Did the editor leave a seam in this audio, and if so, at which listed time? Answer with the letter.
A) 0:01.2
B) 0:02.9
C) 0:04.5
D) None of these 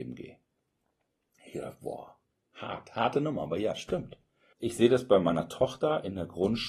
C